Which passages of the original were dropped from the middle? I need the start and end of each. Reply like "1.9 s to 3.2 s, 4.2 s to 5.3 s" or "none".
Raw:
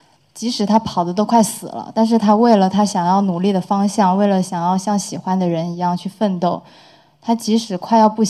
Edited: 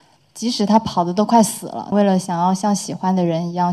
1.9 s to 4.2 s

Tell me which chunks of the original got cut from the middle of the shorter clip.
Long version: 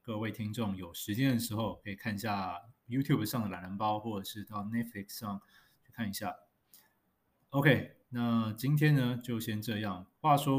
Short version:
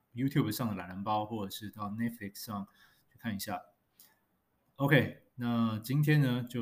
none

